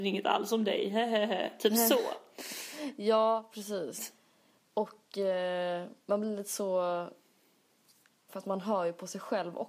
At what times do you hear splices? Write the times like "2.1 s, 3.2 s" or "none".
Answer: 4.0 s, 8.3 s